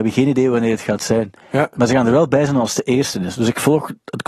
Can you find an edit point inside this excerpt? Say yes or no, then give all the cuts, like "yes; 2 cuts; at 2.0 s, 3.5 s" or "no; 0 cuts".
no; 0 cuts